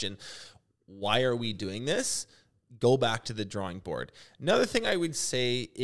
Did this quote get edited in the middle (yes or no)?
no